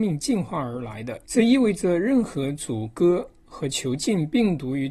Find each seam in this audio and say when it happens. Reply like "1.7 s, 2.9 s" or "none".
none